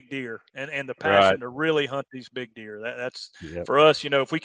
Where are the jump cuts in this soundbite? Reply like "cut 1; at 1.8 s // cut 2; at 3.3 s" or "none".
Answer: none